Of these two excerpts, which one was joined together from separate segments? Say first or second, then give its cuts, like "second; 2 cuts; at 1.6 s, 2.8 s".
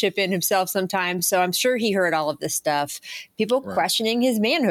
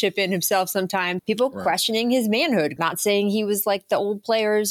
second; 2 cuts; at 1.2 s, 2.8 s